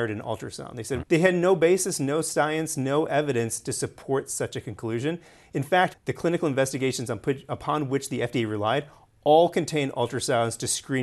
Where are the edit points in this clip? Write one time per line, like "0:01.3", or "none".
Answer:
0:01.0
0:05.9